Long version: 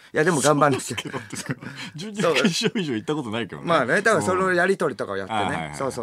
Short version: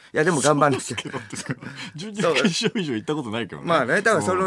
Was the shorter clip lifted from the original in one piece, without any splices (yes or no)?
yes